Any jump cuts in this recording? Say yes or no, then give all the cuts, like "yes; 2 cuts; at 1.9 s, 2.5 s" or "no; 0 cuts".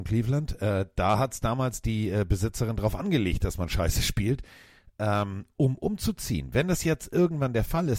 no; 0 cuts